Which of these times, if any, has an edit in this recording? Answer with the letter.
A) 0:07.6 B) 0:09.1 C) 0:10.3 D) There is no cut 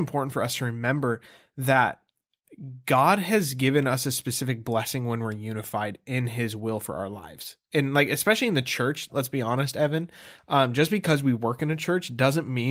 B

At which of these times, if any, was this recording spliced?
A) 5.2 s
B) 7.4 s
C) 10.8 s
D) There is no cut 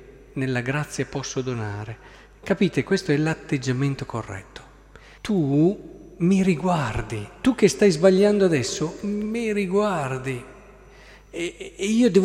A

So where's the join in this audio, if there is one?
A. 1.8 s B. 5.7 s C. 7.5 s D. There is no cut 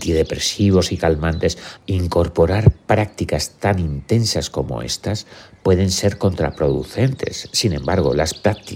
A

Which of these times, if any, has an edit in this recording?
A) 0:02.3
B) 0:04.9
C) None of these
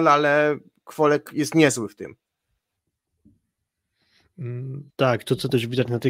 B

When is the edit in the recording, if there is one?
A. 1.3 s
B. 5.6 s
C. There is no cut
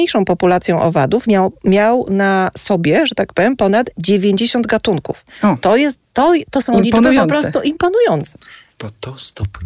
C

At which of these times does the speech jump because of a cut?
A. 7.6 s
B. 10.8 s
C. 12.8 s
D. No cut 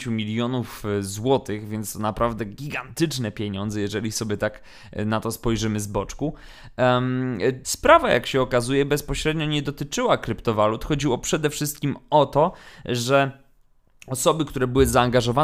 A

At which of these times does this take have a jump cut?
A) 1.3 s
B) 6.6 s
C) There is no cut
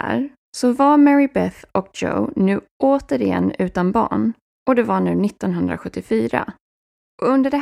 C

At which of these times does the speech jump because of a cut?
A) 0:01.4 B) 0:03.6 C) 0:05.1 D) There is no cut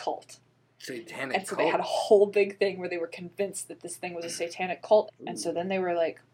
C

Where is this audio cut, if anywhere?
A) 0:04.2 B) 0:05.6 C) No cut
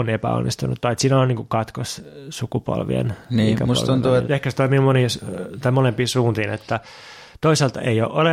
A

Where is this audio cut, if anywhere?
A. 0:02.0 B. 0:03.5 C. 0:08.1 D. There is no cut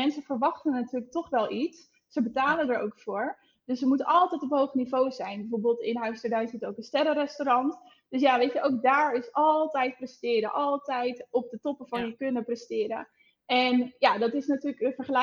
D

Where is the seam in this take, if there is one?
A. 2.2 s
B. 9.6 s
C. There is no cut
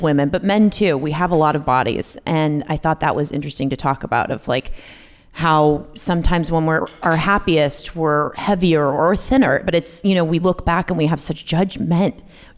B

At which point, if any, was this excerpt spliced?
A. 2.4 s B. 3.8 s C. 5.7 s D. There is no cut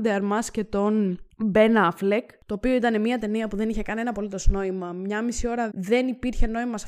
C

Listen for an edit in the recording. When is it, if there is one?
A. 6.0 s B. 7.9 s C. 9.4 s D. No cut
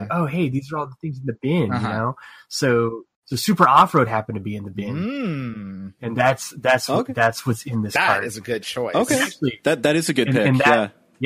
D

